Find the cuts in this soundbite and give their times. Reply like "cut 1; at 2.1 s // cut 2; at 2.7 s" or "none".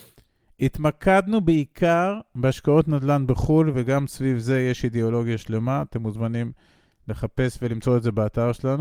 none